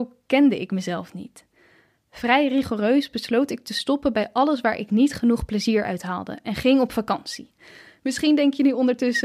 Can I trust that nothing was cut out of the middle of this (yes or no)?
yes